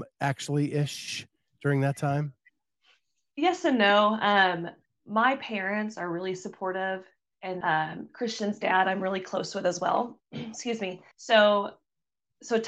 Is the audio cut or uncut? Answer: cut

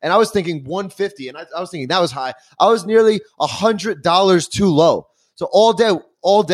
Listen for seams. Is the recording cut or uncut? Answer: uncut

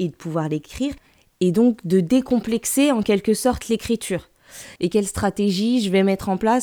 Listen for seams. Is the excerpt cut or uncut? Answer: cut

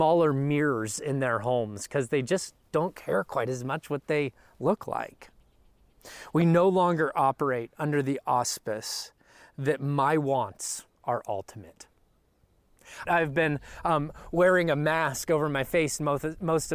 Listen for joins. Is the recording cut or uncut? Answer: cut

